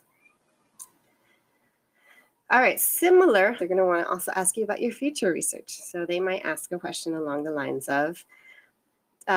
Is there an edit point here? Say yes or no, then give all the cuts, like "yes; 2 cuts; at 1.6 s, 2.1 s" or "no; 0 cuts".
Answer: yes; 1 cut; at 3.6 s